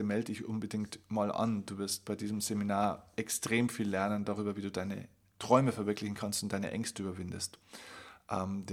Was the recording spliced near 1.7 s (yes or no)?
no